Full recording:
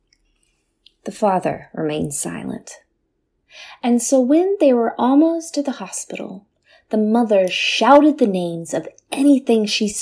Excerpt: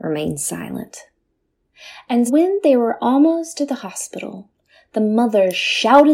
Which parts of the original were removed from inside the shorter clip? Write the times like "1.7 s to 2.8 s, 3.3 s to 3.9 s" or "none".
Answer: 4.0 s to 4.2 s